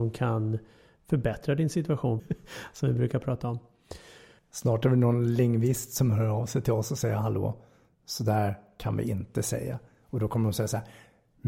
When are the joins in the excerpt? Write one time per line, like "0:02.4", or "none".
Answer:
0:02.2